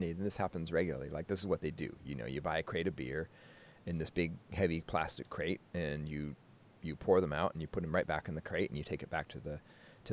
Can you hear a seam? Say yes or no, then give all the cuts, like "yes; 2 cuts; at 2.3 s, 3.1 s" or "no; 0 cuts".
no; 0 cuts